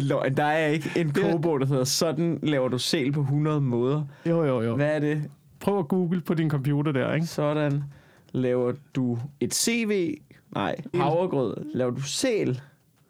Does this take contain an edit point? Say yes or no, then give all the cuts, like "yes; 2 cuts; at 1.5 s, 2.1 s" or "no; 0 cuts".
yes; 1 cut; at 10.9 s